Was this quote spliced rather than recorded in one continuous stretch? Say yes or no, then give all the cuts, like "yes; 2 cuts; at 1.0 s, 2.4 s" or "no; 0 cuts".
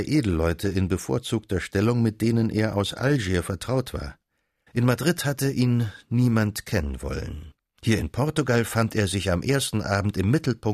yes; 1 cut; at 4.7 s